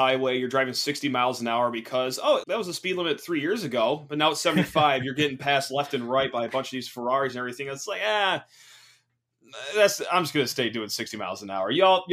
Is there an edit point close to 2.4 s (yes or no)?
yes